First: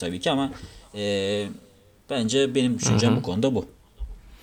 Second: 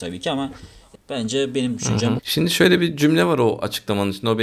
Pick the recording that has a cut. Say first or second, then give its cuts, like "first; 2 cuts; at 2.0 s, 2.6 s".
second; 2 cuts; at 1.0 s, 2.2 s